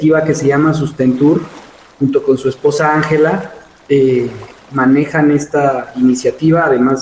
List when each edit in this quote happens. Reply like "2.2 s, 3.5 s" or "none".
none

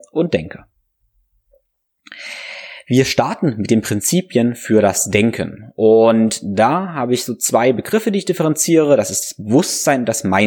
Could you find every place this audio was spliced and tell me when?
none

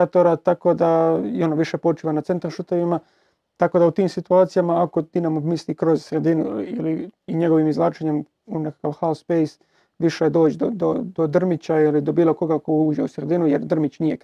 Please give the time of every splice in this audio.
none

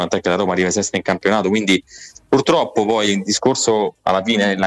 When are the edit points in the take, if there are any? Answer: none

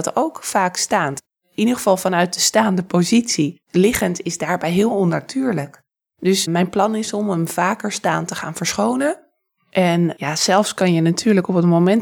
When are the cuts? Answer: 3.6 s

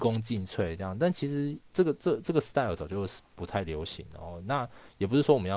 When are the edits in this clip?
none

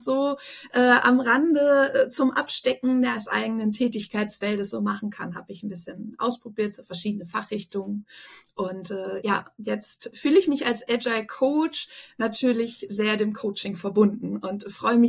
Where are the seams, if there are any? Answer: none

